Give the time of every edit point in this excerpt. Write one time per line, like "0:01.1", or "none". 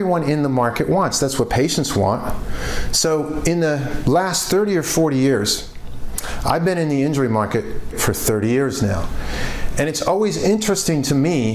0:07.9